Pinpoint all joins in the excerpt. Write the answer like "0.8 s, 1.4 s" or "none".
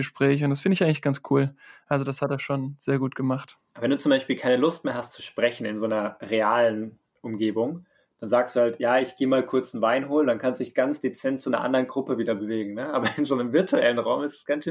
none